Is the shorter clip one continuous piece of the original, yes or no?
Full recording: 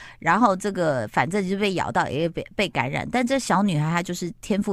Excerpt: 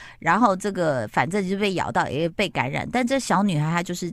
no